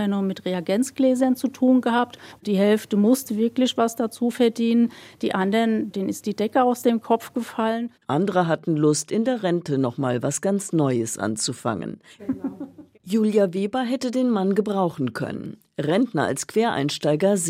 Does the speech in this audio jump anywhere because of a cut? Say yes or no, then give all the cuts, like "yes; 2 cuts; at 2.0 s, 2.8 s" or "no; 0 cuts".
yes; 3 cuts; at 2.4 s, 8.0 s, 12.2 s